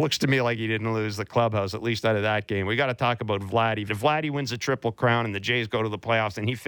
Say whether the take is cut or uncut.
cut